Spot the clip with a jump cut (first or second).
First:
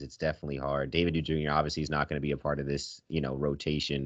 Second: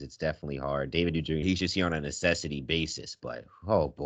second